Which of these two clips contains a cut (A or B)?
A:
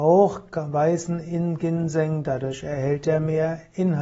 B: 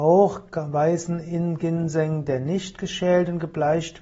A